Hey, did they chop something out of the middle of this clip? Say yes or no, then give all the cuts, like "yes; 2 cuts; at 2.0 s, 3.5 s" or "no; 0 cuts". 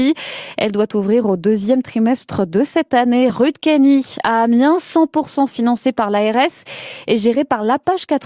no; 0 cuts